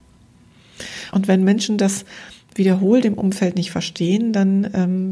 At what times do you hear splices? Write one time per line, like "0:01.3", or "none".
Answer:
0:01.1